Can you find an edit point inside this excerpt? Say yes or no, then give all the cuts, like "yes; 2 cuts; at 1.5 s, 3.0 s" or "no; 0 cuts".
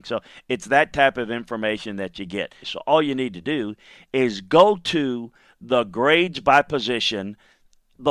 yes; 1 cut; at 2.6 s